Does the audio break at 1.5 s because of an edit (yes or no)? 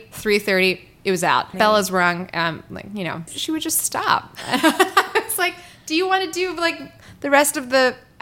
yes